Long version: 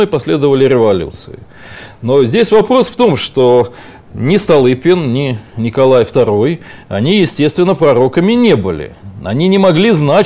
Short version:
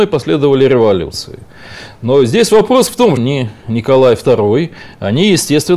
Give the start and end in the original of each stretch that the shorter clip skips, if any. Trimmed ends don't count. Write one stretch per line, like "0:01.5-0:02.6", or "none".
0:03.2-0:05.1